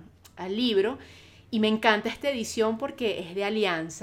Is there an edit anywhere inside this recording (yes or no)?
no